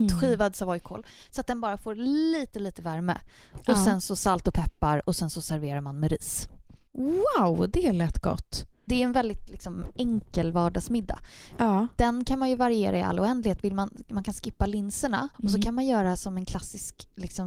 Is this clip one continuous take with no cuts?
no; 1 cut; at 15.3 s

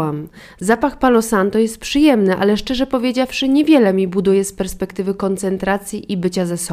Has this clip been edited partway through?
no; 0 cuts

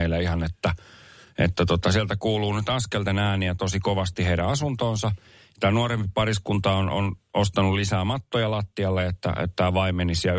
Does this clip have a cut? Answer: no; 0 cuts

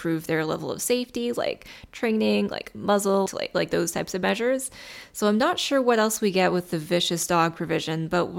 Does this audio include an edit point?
yes; 1 cut; at 3.3 s

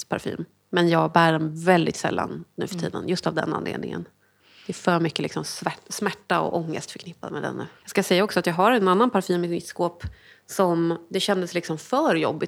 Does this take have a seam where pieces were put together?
yes; 1 cut; at 7.8 s

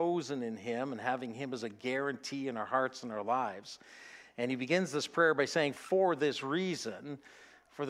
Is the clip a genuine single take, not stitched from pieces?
yes; 0 cuts

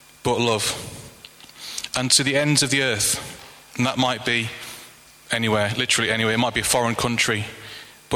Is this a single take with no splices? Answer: yes; 0 cuts

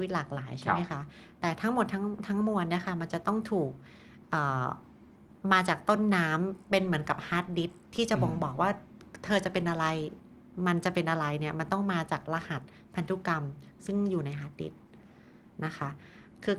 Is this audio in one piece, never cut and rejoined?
yes; 0 cuts

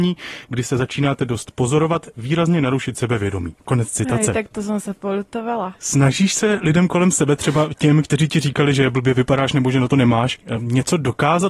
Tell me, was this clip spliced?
no; 0 cuts

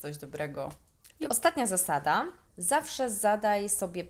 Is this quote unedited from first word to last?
no; 2 cuts; at 1.3 s, 2.4 s

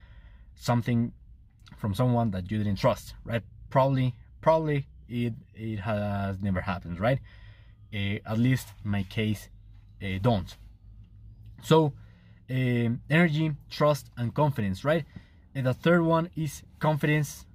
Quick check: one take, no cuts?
yes; 0 cuts

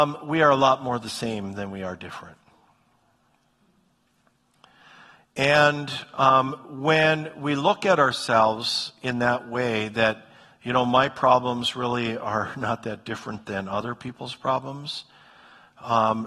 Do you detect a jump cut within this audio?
no; 0 cuts

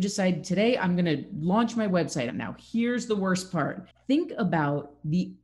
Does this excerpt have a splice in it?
yes; 2 cuts; at 2.3 s, 3.9 s

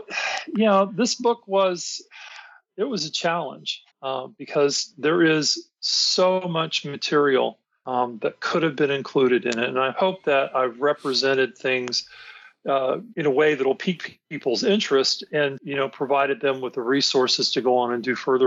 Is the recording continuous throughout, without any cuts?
no; 3 cuts; at 3.9 s, 13.1 s, 15.6 s

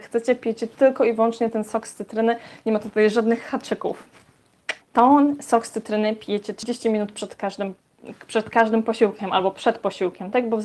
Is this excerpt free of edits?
no; 1 cut; at 4.8 s

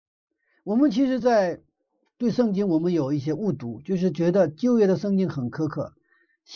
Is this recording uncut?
yes; 0 cuts

